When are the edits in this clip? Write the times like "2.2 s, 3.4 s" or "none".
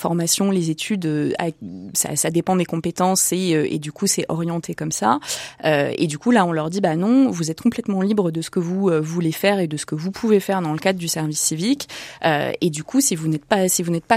none